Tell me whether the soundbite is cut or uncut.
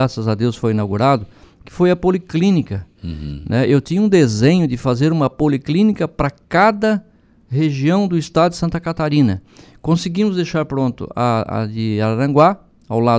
uncut